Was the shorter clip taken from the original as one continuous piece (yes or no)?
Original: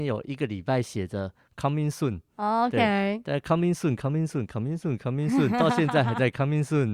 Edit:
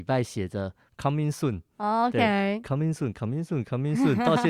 no